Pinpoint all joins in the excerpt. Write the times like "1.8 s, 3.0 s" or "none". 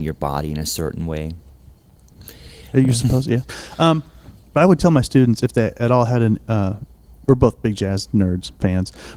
2.7 s